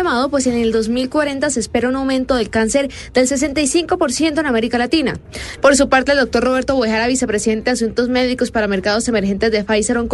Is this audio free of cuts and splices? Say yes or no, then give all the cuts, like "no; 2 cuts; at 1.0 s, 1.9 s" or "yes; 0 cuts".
no; 1 cut; at 5.6 s